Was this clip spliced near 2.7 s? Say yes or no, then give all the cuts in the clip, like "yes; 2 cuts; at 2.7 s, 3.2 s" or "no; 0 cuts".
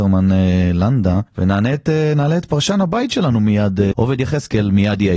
no; 2 cuts; at 1.3 s, 3.9 s